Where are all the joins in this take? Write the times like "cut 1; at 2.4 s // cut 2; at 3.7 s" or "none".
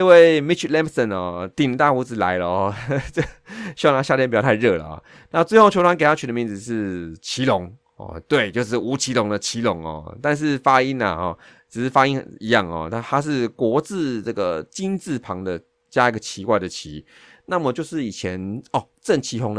none